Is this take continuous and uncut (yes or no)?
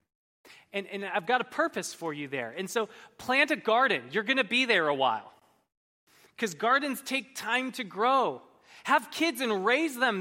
yes